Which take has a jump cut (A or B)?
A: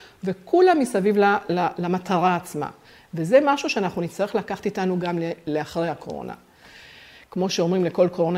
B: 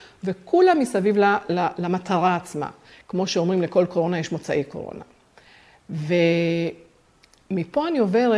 B